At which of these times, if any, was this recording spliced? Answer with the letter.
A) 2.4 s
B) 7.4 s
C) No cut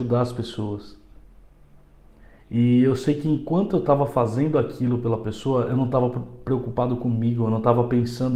A